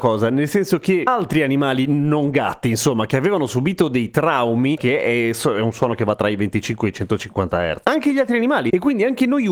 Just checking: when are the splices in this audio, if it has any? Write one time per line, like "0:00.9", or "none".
0:04.8
0:07.8

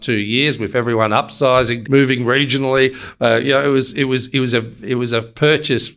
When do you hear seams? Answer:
0:01.8

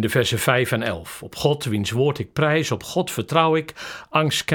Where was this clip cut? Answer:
none

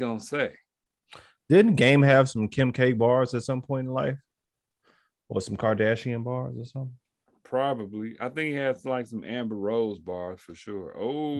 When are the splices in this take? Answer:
none

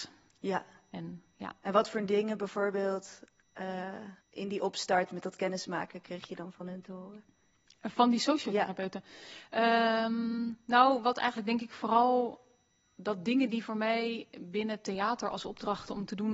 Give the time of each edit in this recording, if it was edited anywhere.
0:04.2

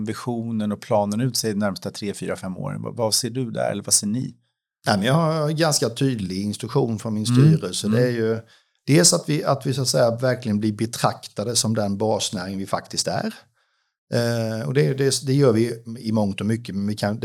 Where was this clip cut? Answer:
none

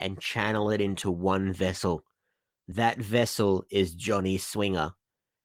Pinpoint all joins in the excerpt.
none

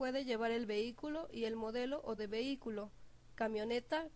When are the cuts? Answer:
0:02.2

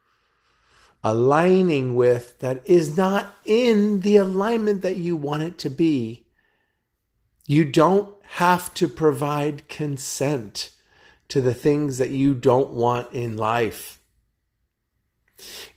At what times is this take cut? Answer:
none

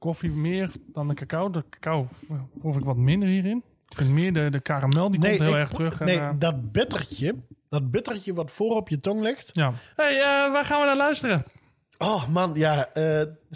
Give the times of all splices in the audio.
0:09.9

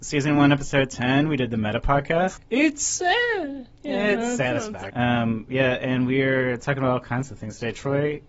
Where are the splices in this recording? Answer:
0:02.4
0:04.9

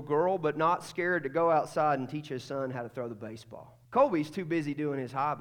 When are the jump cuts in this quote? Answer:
0:03.9

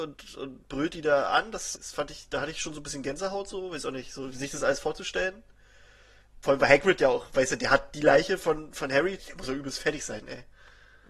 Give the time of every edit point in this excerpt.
0:01.8
0:09.2

